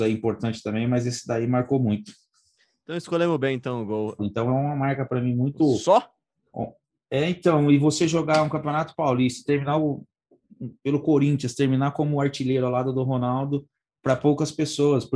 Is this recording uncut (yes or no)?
no